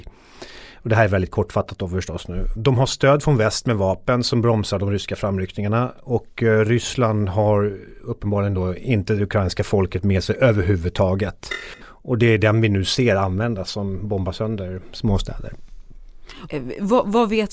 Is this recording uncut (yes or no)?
no